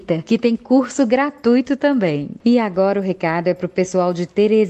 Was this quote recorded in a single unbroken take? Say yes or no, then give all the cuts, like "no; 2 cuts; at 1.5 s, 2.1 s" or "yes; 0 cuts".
yes; 0 cuts